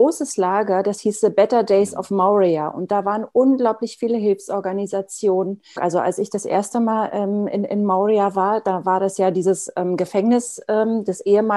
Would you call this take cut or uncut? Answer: cut